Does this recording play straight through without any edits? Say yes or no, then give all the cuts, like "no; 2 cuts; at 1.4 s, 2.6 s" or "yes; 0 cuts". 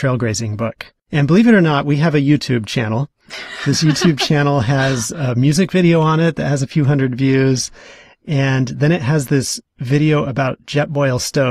yes; 0 cuts